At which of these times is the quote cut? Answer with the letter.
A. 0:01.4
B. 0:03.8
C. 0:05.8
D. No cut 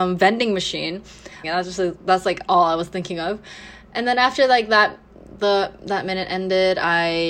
A